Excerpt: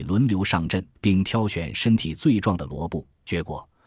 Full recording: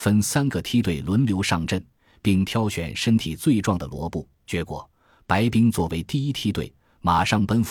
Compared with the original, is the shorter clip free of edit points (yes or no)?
no